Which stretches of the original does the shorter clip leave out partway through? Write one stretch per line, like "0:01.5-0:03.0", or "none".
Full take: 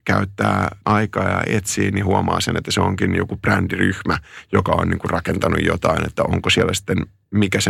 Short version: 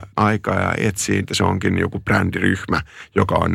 0:01.9-0:02.6